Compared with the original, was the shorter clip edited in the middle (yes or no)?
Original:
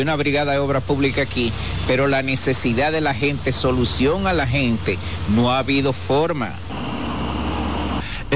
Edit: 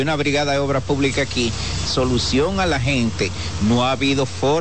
yes